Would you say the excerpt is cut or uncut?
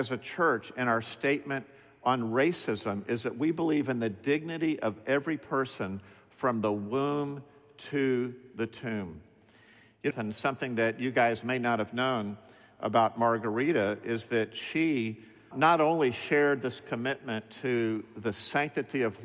cut